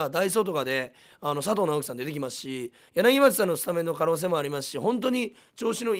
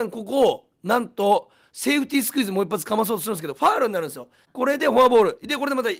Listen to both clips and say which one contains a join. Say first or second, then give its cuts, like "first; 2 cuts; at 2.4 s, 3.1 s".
second; 1 cut; at 4.4 s